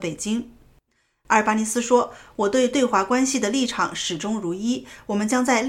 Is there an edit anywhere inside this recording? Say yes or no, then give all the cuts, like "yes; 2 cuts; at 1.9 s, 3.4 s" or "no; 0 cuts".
no; 0 cuts